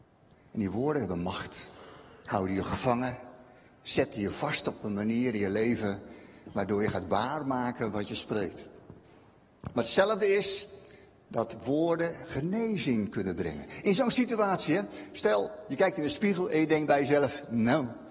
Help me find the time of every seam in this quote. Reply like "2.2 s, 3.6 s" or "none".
none